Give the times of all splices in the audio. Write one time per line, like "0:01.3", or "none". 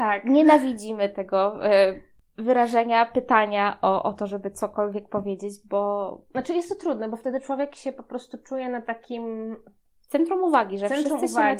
none

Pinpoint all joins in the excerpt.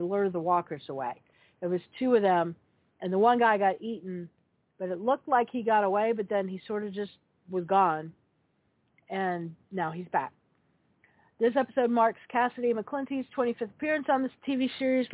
none

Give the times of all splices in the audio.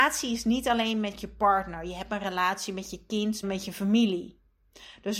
0:03.4

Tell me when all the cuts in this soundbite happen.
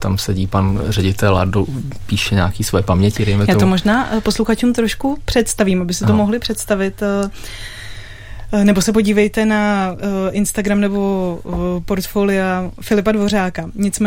none

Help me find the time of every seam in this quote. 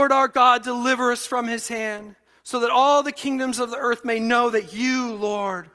none

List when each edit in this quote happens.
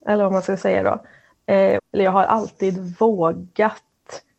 0:01.8

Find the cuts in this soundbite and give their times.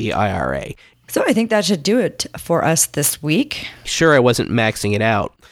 0:00.9
0:03.9

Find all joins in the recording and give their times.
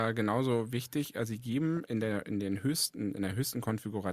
none

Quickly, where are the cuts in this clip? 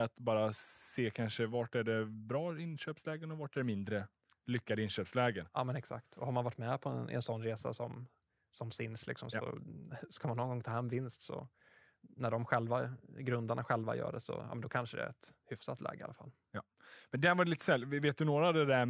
none

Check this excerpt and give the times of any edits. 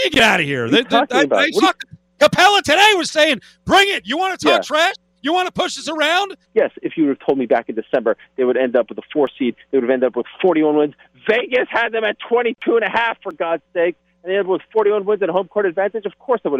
0:06.4

